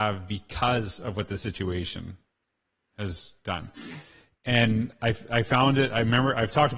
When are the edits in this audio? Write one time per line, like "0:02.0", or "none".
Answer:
none